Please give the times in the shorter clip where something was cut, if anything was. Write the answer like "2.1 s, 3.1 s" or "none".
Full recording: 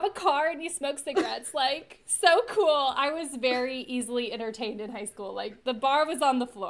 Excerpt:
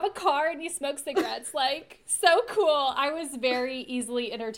none